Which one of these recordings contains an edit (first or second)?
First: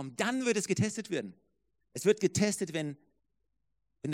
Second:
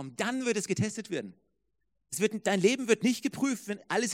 first